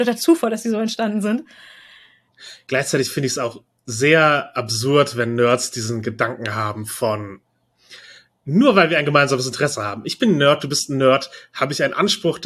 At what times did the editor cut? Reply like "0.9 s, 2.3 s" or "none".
none